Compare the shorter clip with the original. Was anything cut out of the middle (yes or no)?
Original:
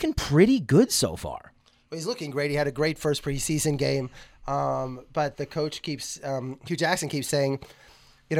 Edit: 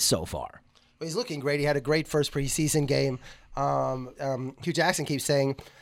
yes